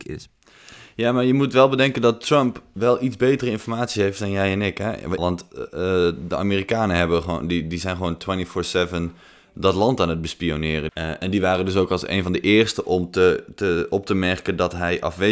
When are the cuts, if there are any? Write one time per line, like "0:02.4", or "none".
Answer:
0:05.2
0:10.9